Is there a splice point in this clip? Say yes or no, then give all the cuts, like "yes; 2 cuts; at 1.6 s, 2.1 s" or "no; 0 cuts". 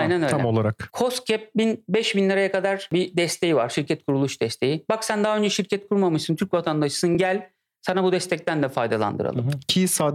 no; 0 cuts